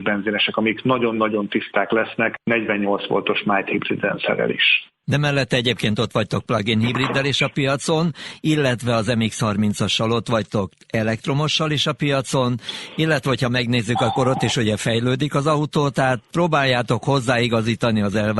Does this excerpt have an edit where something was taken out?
no; 0 cuts

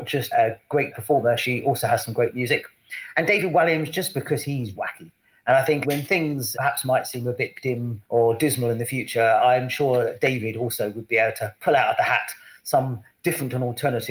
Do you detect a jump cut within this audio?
yes; 1 cut; at 4.7 s

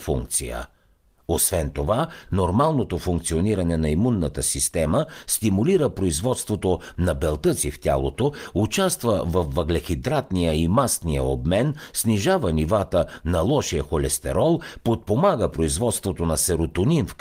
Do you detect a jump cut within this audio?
yes; 1 cut; at 2.3 s

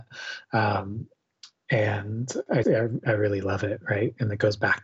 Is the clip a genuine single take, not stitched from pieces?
no; 1 cut; at 2.6 s

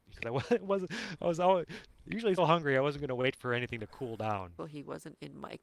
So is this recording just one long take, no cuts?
no; 2 cuts; at 2.4 s, 4.6 s

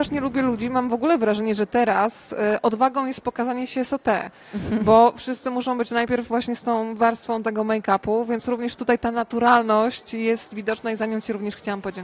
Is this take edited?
no; 0 cuts

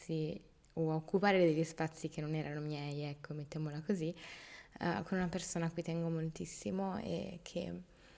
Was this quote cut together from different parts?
no; 0 cuts

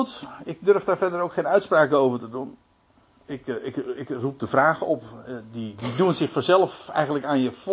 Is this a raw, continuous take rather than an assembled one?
yes; 0 cuts

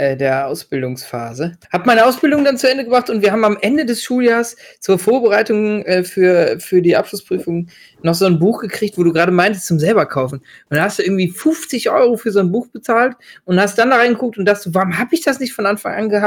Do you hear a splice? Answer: yes; 1 cut; at 1.6 s

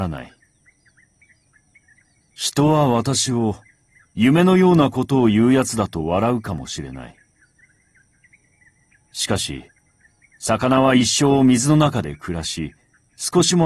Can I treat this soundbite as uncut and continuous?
no; 1 cut; at 2.2 s

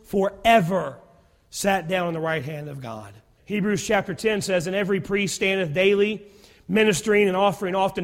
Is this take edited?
yes; 1 cut; at 3.4 s

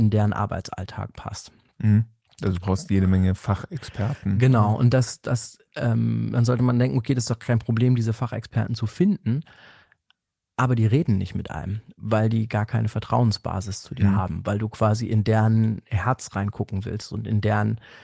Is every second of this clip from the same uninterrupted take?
yes; 0 cuts

